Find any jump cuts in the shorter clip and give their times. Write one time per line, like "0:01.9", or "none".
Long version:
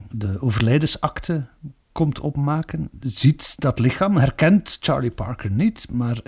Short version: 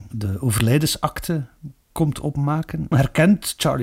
0:02.9